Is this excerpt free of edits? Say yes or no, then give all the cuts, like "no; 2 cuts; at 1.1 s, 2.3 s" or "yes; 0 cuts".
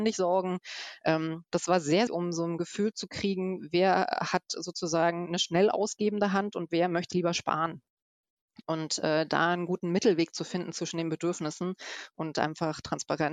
no; 2 cuts; at 2.1 s, 7.1 s